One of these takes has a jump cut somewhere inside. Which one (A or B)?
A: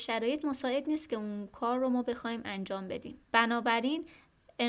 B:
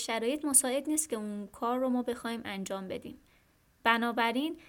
A